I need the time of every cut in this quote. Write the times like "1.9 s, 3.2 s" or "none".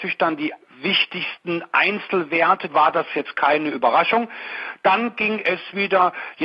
2.7 s